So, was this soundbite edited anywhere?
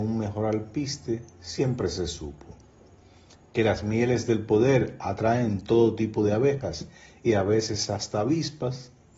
no; 0 cuts

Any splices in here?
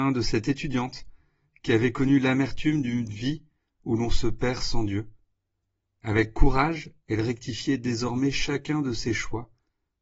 no; 0 cuts

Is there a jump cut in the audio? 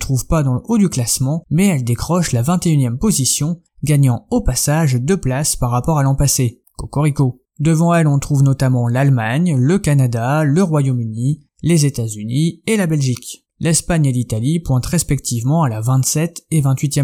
no; 0 cuts

